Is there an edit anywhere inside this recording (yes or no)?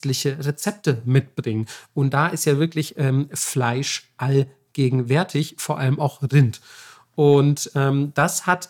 no